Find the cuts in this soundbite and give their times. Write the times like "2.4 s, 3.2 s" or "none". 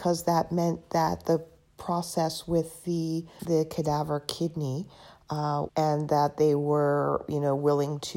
3.4 s, 5.7 s

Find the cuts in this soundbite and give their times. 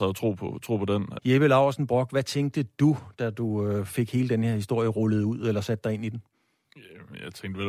1.2 s

